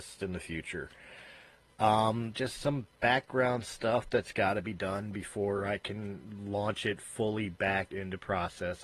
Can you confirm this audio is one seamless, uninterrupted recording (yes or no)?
no